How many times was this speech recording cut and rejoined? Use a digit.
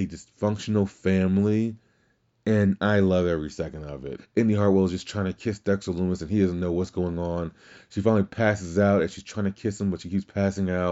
1